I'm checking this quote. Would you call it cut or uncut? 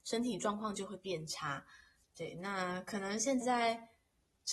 cut